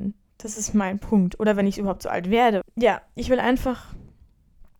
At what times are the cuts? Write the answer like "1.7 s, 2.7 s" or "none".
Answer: 2.6 s